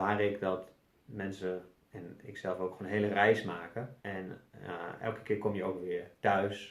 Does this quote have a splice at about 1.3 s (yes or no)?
no